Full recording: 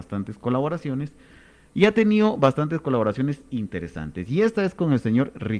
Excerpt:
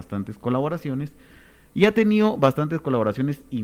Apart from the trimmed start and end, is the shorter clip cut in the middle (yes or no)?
no